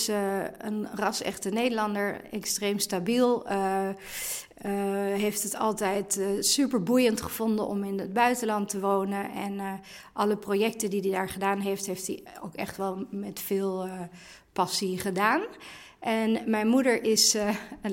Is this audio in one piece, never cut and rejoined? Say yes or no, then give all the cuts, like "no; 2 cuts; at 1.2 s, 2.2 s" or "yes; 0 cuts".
yes; 0 cuts